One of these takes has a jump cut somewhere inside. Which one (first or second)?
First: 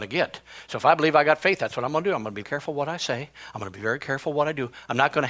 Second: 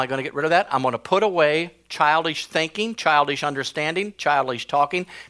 first